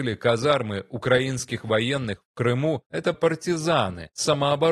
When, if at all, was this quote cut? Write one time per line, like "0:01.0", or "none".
0:03.1